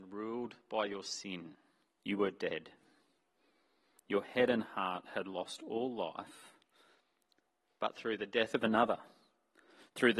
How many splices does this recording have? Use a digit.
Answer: 1